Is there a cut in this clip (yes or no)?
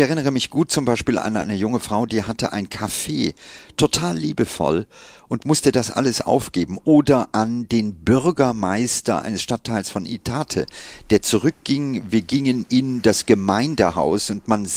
no